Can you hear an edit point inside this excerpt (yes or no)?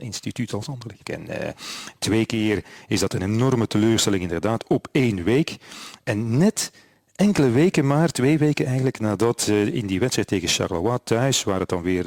yes